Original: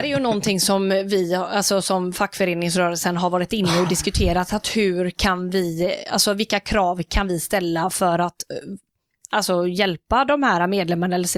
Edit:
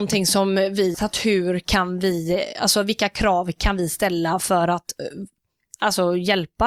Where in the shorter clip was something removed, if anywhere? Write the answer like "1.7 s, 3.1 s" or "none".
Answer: 0.9 s